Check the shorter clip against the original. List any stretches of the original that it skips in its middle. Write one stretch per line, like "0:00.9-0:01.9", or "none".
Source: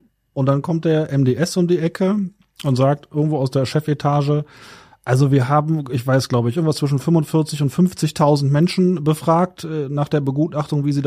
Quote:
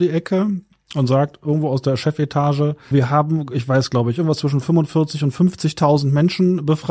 0:04.6-0:05.3